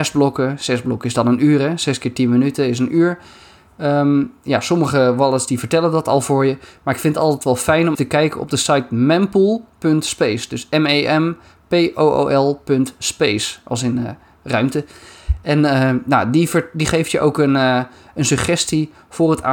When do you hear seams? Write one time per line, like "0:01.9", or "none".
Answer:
0:07.9

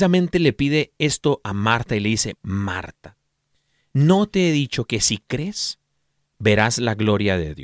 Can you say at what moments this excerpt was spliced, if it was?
0:02.3

